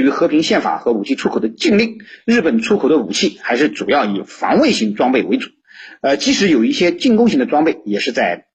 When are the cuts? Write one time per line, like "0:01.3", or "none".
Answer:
none